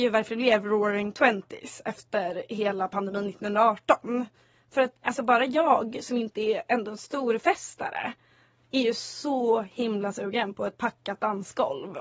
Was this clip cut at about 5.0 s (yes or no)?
yes